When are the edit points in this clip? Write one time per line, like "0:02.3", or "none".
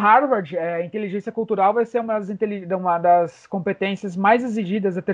none